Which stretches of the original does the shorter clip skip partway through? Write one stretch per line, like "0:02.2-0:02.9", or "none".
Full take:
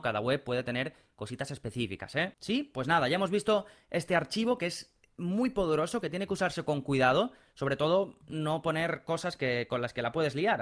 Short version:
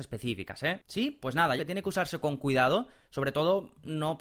0:03.1-0:06.0